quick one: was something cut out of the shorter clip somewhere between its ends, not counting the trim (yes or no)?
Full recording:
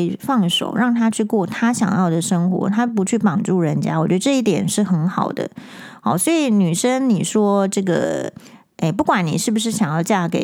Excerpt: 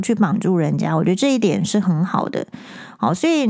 no